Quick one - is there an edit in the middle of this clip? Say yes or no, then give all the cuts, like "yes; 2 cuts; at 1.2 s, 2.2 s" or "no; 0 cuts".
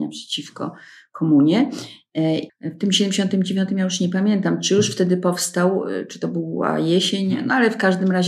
yes; 1 cut; at 2.5 s